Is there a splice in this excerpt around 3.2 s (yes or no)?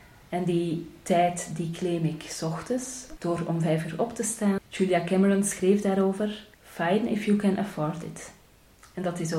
yes